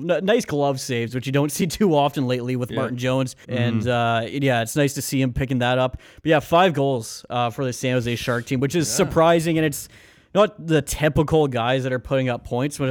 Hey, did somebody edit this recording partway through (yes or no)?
yes